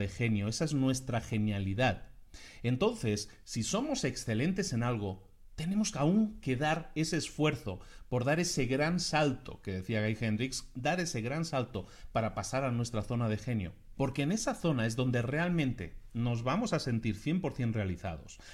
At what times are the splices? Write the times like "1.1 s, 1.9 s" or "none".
13.9 s